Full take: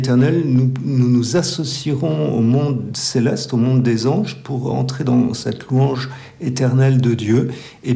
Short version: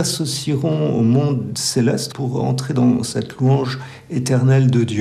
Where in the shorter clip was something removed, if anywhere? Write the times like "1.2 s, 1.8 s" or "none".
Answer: 2.1 s

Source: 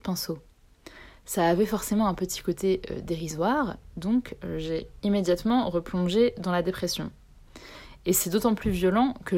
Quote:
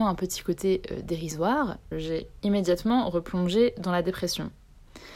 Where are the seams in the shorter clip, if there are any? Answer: 1.9 s

